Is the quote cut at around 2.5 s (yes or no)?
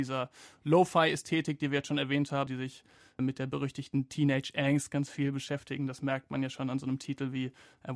yes